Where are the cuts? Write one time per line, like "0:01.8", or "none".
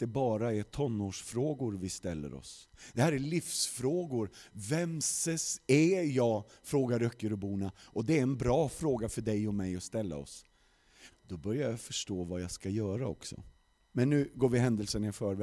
0:11.1